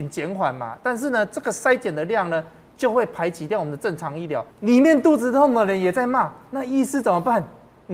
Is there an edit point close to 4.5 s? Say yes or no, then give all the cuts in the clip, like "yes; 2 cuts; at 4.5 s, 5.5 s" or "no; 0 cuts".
yes; 1 cut; at 4.5 s